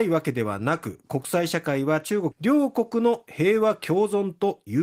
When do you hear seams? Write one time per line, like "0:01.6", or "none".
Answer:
0:02.3